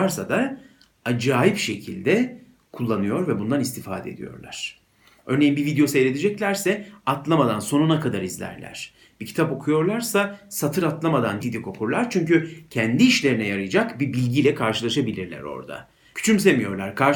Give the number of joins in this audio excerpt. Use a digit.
2